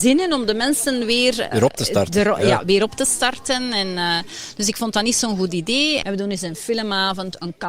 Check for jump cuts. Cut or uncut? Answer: cut